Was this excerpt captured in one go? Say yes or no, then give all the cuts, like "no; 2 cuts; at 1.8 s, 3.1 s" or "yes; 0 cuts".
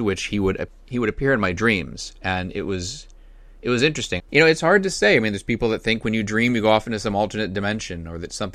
no; 1 cut; at 4.2 s